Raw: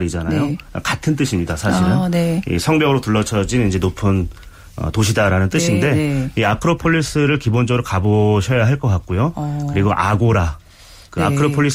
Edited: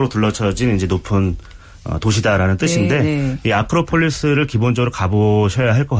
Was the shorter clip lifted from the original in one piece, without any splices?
yes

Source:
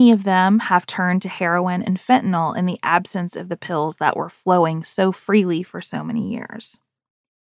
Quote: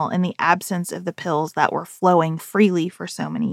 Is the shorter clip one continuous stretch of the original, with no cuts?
no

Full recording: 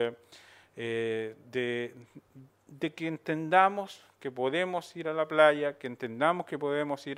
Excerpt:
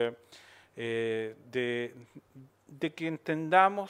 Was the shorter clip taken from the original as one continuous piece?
yes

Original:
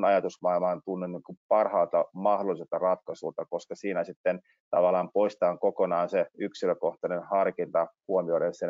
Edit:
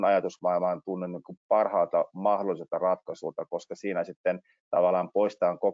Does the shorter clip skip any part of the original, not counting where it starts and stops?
no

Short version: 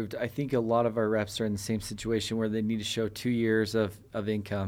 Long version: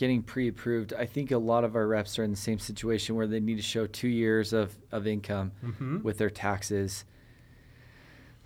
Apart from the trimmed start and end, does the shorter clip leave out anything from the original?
no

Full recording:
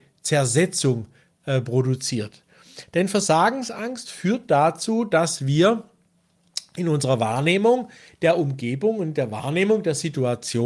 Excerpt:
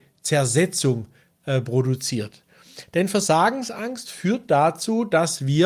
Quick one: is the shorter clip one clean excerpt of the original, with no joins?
yes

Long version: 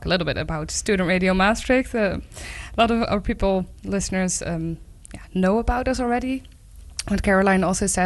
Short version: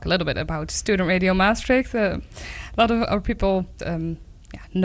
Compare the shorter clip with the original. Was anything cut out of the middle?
yes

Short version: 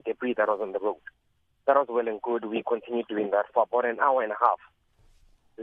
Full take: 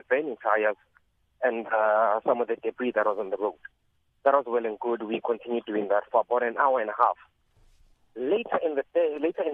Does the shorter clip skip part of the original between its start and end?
no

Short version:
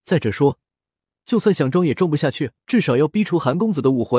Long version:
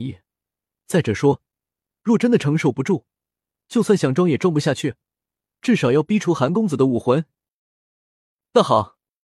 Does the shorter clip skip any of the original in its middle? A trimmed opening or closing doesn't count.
yes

